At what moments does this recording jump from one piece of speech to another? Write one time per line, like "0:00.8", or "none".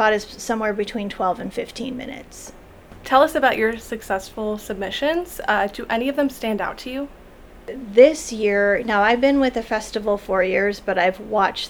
none